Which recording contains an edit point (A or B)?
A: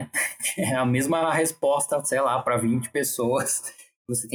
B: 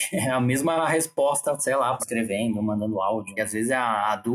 B